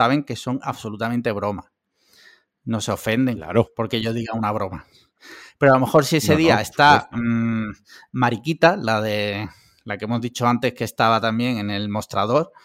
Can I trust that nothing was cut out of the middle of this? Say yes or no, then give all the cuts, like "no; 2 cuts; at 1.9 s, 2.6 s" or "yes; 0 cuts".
yes; 0 cuts